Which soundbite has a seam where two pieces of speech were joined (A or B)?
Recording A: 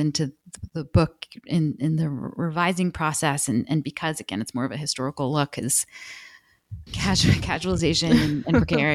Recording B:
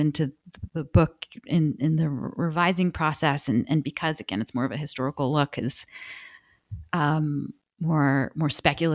A